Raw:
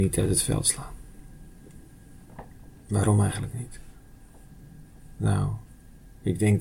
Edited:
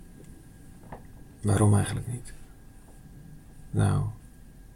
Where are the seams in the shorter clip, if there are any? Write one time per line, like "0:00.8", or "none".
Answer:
none